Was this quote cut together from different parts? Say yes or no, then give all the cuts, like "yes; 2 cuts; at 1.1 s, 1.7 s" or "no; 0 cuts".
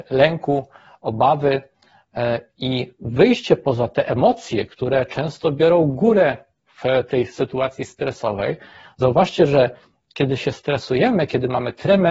no; 0 cuts